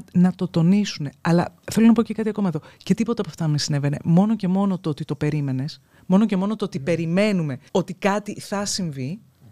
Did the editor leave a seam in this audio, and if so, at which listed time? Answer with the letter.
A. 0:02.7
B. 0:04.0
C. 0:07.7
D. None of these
C